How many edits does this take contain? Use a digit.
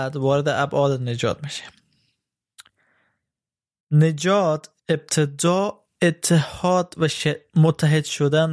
1